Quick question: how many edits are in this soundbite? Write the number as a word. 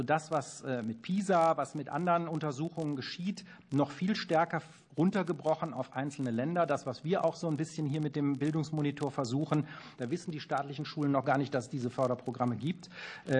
one